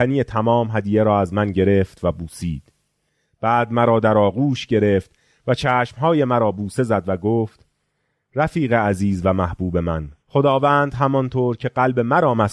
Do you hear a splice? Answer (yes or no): yes